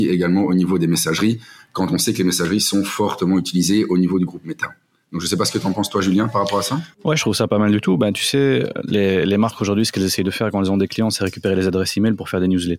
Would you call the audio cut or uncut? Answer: cut